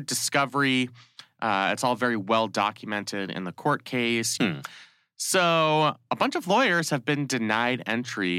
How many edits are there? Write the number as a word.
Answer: one